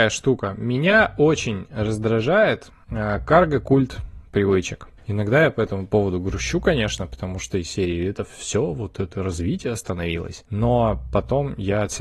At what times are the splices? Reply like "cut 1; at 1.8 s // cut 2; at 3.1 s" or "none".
cut 1; at 5.0 s